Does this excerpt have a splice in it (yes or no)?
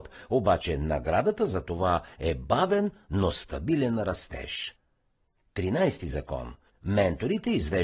yes